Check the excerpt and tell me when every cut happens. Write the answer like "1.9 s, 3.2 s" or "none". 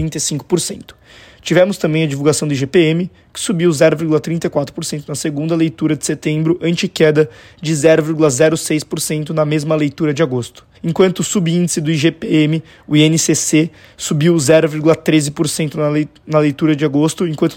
10.7 s

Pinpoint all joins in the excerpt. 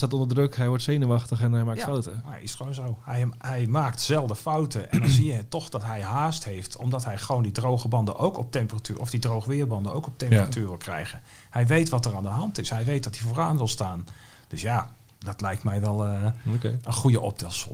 3.4 s

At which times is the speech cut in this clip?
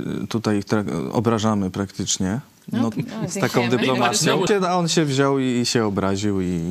2.9 s, 4.5 s

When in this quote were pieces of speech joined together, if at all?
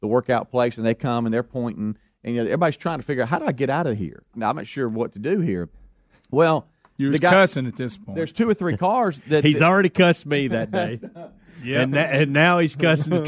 4.3 s

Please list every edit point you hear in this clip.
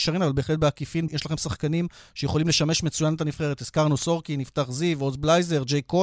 1.1 s

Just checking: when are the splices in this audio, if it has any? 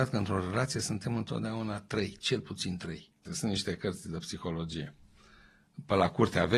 3.3 s

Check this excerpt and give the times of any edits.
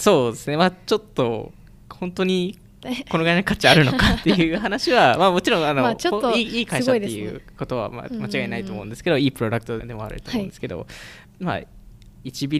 9.8 s, 11.3 s

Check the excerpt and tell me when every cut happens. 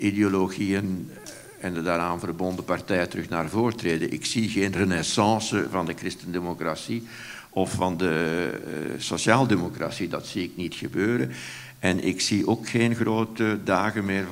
none

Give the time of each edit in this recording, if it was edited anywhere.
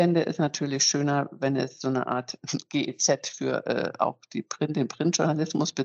none

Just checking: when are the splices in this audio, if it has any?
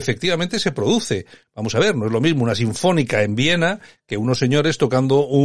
none

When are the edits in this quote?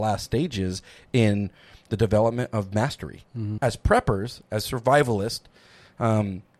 3.6 s

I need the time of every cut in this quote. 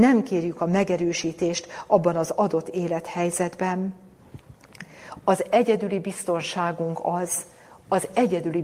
none

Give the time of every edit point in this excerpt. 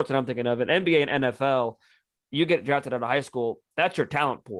none

